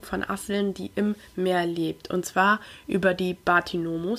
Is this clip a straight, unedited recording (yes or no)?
yes